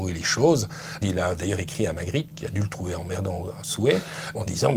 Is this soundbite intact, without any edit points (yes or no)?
yes